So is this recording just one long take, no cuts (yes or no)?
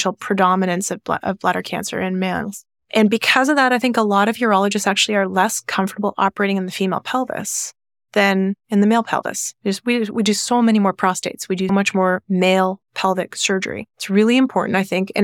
no